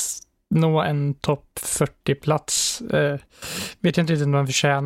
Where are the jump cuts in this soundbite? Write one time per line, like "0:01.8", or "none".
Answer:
none